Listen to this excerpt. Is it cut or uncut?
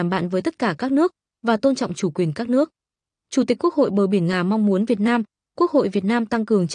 uncut